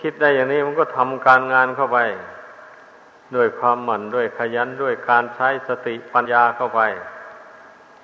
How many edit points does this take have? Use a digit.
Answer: 1